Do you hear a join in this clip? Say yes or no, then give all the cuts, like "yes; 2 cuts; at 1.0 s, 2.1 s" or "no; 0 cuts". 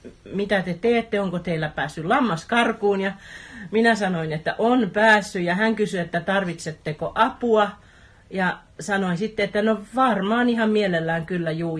no; 0 cuts